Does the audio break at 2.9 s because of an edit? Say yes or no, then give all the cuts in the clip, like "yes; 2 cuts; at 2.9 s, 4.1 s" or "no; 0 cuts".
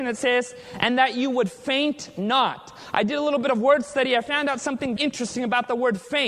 no; 1 cut; at 5.0 s